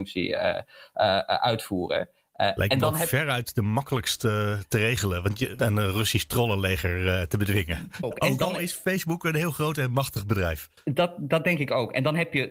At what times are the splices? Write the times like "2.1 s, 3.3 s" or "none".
5.6 s, 8.0 s